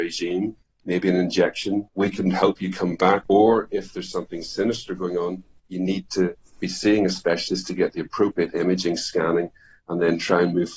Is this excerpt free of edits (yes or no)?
no